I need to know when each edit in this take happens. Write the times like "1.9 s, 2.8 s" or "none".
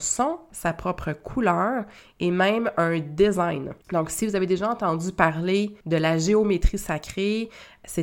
3.8 s, 5.8 s